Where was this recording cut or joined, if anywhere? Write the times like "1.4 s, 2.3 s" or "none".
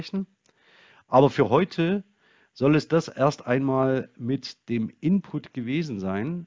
none